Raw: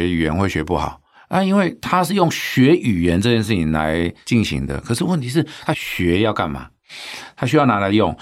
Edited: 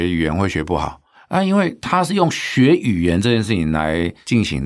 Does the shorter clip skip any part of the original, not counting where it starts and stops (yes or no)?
no